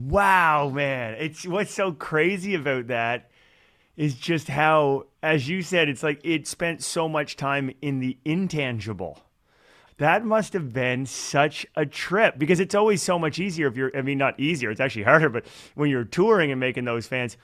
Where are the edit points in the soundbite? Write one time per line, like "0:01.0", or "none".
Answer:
0:05.1
0:09.9